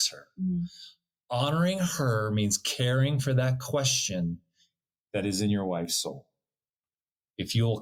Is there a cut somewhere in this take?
no; 0 cuts

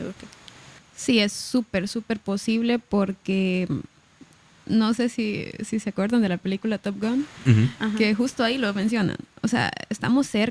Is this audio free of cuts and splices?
yes; 0 cuts

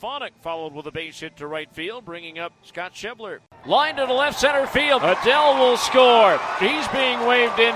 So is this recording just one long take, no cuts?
no; 3 cuts; at 3.6 s, 5.0 s, 6.6 s

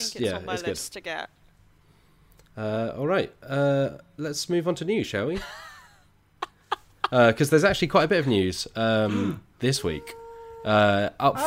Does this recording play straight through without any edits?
yes; 0 cuts

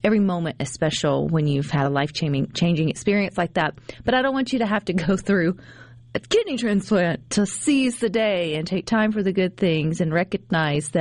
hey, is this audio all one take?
yes; 0 cuts

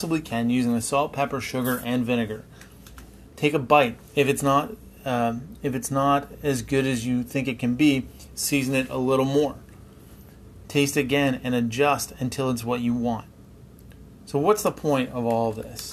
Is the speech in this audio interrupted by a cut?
no; 0 cuts

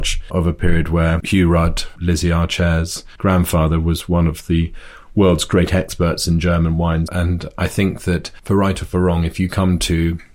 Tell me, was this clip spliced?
yes; 1 cut; at 7.1 s

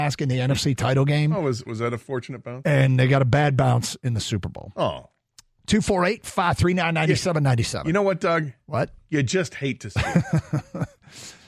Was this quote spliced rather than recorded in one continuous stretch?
no; 0 cuts

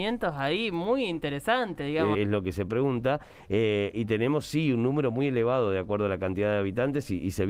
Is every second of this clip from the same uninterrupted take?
no; 1 cut; at 2.1 s

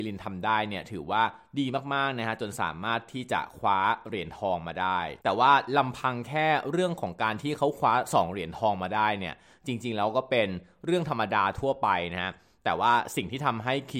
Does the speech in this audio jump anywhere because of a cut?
yes; 1 cut; at 5.2 s

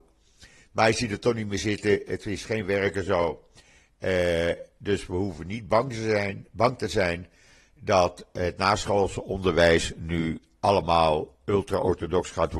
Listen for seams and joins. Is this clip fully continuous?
yes; 0 cuts

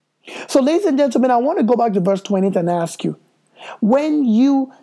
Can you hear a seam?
no; 0 cuts

